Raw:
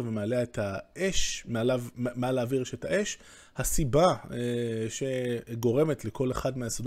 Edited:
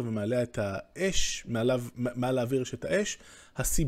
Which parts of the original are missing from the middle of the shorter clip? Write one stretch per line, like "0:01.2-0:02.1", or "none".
none